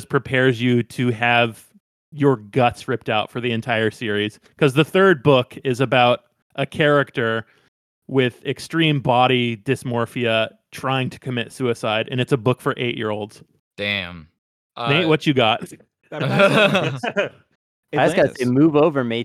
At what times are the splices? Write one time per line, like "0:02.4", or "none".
none